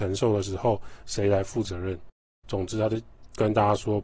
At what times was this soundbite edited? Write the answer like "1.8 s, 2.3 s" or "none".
2.4 s